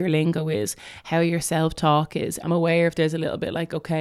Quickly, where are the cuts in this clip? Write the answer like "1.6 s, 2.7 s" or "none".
2.4 s